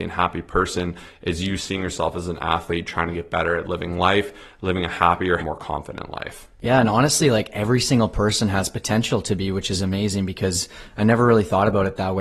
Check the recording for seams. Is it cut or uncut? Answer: cut